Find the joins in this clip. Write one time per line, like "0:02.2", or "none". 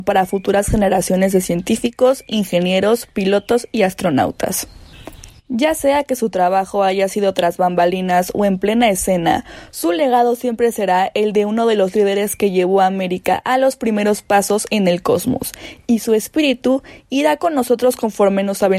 none